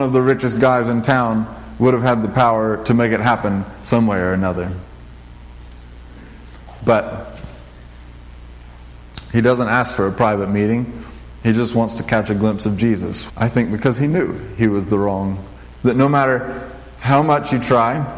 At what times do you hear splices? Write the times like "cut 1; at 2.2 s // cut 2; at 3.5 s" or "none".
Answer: cut 1; at 13.3 s // cut 2; at 15.7 s